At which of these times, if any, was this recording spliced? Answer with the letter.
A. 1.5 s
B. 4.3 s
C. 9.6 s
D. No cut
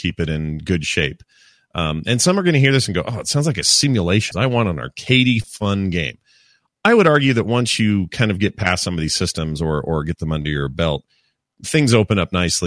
B